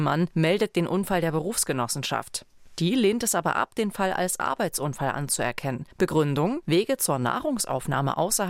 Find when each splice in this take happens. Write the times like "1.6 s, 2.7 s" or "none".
5.9 s